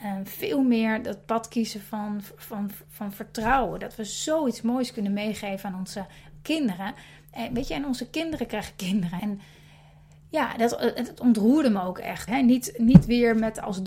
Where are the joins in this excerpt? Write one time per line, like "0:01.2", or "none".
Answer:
0:09.2
0:12.3